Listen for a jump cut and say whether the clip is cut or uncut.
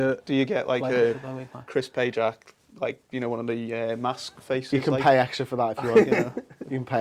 uncut